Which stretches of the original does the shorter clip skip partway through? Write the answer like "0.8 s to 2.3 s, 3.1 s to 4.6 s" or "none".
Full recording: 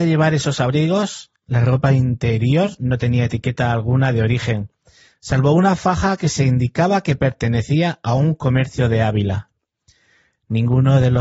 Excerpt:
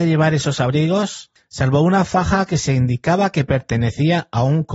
1.4 s to 5.1 s